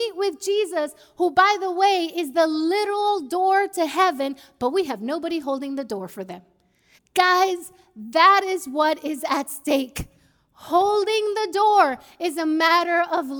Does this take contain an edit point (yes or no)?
yes